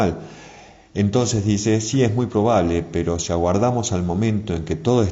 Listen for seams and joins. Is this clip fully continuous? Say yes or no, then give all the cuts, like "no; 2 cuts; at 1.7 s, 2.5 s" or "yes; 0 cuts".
yes; 0 cuts